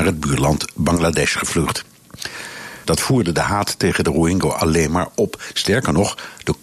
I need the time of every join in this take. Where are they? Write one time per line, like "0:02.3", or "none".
0:02.8